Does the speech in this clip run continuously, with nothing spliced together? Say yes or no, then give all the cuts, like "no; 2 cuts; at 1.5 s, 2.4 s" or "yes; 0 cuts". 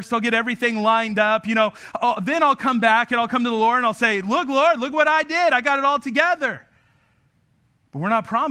yes; 0 cuts